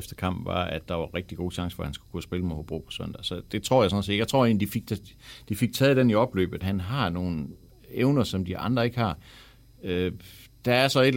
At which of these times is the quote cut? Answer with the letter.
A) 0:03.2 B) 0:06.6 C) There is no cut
B